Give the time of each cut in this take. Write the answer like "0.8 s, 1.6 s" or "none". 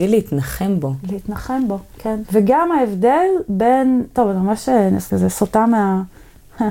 2.2 s